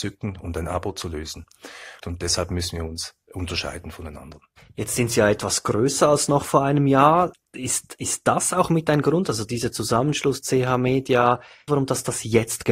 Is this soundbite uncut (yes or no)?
no